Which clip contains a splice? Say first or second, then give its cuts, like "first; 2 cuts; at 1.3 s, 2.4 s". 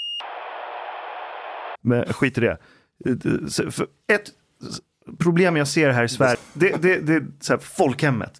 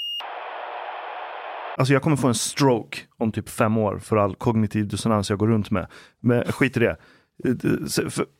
first; 2 cuts; at 1.8 s, 6.3 s